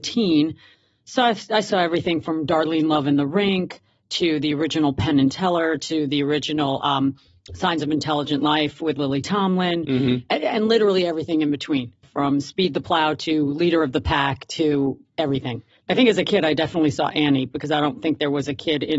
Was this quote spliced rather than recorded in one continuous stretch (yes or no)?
yes